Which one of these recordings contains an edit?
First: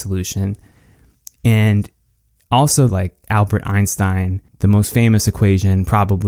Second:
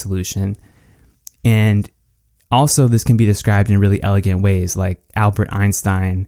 first; 2 cuts; at 2.9 s, 4.5 s

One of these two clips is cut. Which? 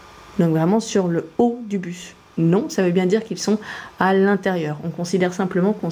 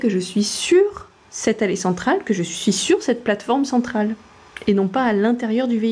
first; 1 cut; at 2.3 s

